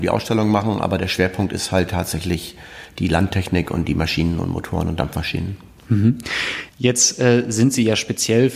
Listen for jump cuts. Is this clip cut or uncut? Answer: cut